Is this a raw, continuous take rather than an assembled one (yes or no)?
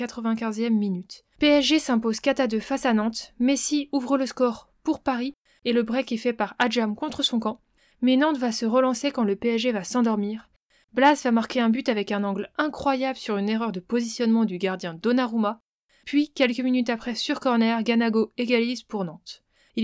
no